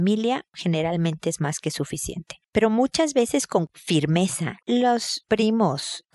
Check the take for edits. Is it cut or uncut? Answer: cut